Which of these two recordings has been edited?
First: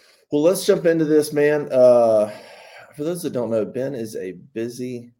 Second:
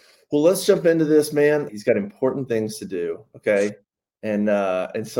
second; 1 cut; at 1.7 s

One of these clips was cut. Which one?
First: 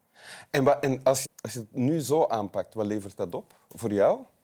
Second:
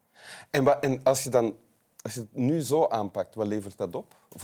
first; 1 cut; at 1.2 s

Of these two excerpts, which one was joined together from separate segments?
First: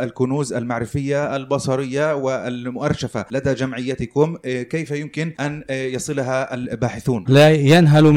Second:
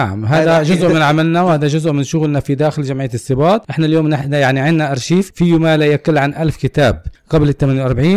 first; 1 cut; at 7.3 s

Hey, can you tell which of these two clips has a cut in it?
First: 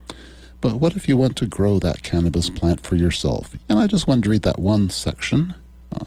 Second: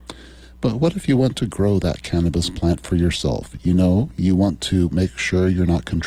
first; 1 cut; at 3.6 s

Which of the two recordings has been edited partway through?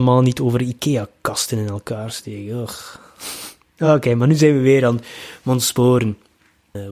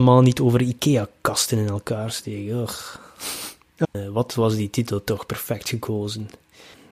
second; 1 cut; at 3.8 s

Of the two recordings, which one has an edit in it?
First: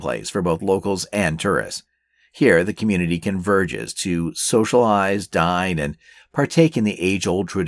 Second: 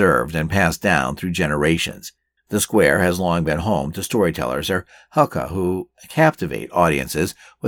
second; 1 cut; at 2.4 s

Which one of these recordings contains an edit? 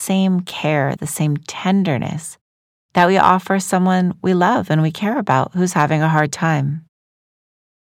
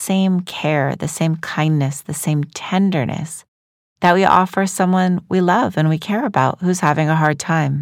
first; 1 cut; at 1.0 s

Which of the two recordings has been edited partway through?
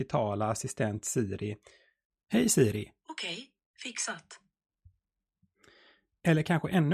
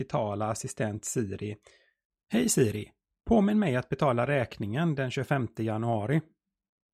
first; 1 cut; at 3.0 s

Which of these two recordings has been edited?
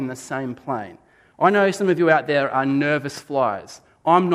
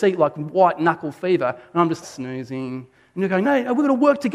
second; 2 cuts; at 2.0 s, 3.4 s

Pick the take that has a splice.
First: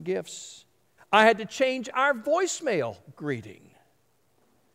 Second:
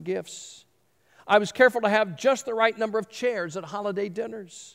first; 1 cut; at 1.0 s

